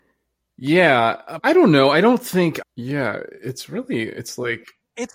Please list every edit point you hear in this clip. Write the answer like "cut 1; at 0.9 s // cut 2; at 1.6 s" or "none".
cut 1; at 1.4 s // cut 2; at 2.6 s